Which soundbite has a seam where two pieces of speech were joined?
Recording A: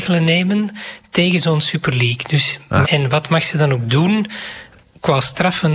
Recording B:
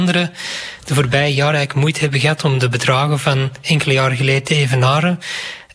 A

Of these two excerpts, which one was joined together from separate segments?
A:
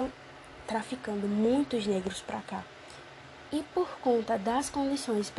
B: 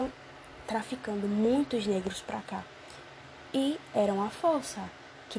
A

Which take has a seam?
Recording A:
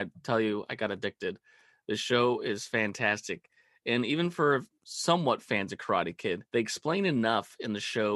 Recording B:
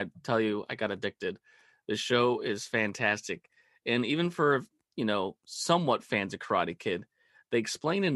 A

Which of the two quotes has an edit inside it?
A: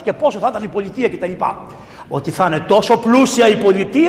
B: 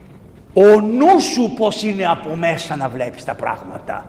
A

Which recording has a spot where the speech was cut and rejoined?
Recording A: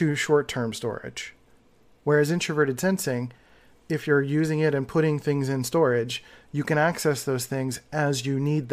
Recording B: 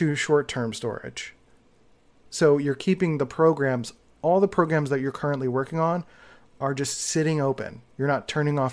A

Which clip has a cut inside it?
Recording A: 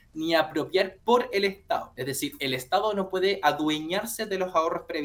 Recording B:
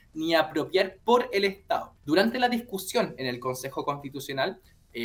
B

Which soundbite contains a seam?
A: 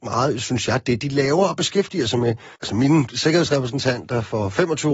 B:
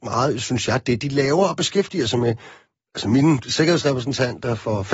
A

